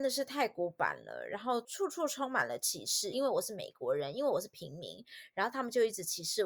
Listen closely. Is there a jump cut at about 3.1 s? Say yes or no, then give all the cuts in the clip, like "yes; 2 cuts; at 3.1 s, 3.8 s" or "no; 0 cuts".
yes; 1 cut; at 3.1 s